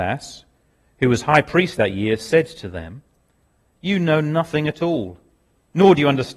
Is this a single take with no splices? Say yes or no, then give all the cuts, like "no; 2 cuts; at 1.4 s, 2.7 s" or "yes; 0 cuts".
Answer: yes; 0 cuts